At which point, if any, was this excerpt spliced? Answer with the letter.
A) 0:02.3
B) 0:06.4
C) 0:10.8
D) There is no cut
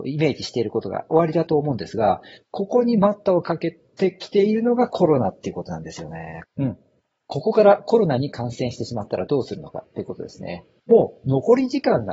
B